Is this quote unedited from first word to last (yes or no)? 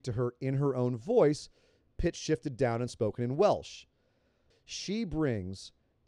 no